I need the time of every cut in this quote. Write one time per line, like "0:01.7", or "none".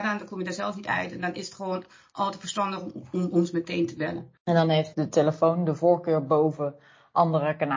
0:04.9